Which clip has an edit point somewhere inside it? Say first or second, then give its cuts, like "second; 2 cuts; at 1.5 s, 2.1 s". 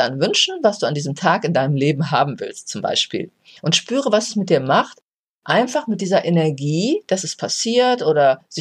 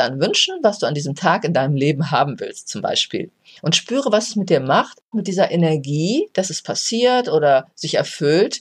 second; 1 cut; at 5.1 s